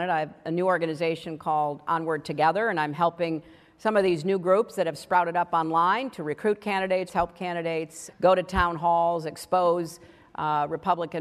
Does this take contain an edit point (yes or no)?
yes